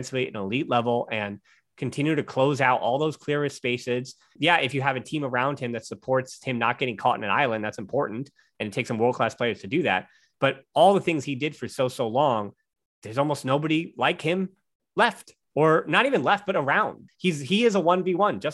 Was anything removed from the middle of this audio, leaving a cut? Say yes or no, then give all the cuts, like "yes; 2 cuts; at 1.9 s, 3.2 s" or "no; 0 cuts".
yes; 1 cut; at 17.1 s